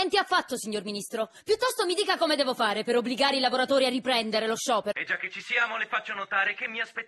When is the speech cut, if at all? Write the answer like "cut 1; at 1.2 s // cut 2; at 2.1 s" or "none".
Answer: cut 1; at 4.9 s